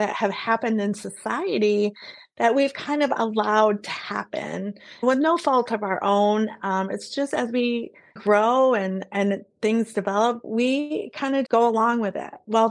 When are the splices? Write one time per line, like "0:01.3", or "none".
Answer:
0:10.4
0:11.5